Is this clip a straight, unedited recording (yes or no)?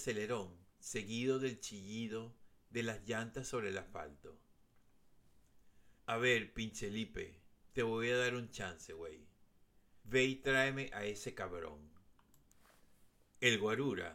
no